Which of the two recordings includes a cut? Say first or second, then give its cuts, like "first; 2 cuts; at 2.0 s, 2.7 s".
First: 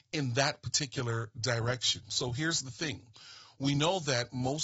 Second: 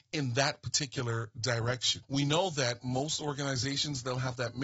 second; 1 cut; at 2.0 s